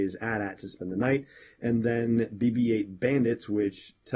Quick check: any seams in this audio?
no; 0 cuts

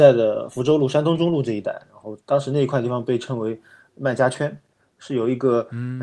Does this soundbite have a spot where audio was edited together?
no; 0 cuts

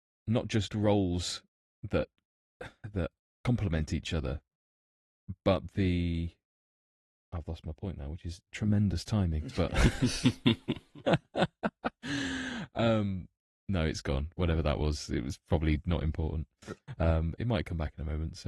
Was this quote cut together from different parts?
no; 0 cuts

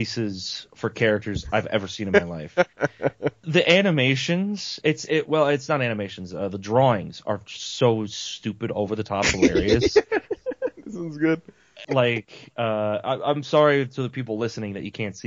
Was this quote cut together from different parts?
yes; 2 cuts; at 3.4 s, 11.8 s

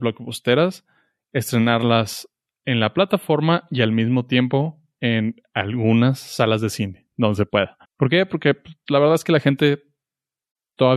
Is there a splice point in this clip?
yes; 1 cut; at 7.8 s

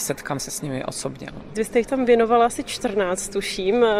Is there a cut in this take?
yes; 1 cut; at 1.5 s

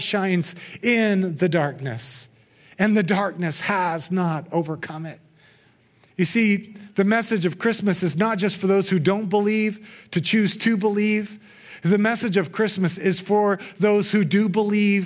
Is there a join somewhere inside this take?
no; 0 cuts

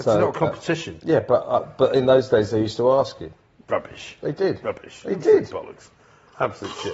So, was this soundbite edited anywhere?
no; 0 cuts

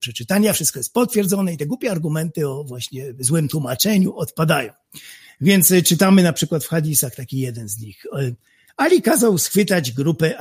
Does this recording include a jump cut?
yes; 1 cut; at 8.7 s

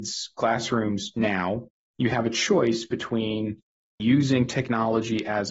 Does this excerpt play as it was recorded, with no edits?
yes; 0 cuts

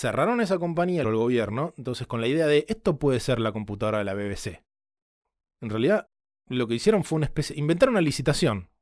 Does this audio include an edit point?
yes; 1 cut; at 1.0 s

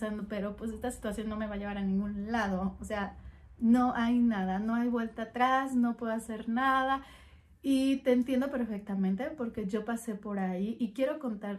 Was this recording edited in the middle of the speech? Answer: no; 0 cuts

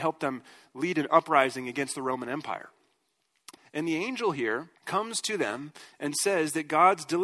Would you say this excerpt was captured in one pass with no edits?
no; 2 cuts; at 3.6 s, 4.8 s

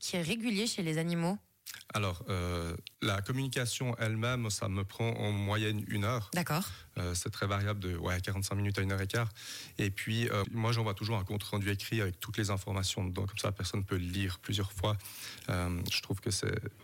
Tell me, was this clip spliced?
yes; 2 cuts; at 2.9 s, 10.4 s

